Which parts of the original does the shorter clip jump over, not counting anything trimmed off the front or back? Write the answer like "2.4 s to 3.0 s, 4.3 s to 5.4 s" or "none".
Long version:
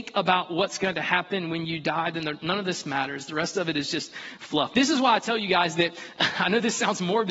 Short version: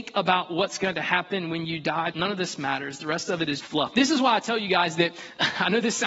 2.1 s to 2.4 s, 3.9 s to 4.4 s

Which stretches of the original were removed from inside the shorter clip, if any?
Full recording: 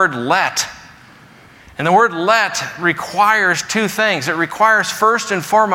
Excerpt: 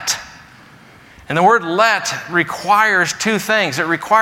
none

